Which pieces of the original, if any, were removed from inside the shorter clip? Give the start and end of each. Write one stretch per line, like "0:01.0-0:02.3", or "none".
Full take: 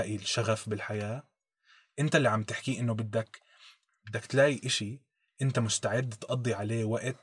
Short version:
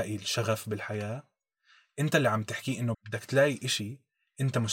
0:02.9-0:04.0